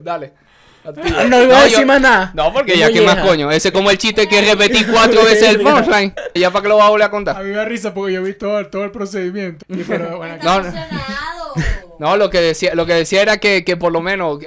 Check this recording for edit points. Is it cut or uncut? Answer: cut